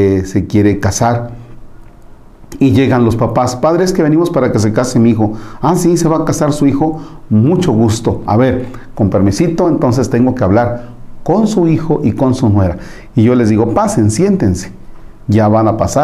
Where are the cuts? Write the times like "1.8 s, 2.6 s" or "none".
none